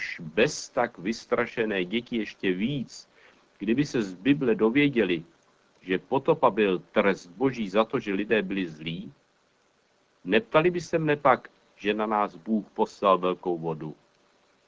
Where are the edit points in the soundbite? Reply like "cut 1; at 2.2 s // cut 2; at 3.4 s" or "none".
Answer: cut 1; at 11.7 s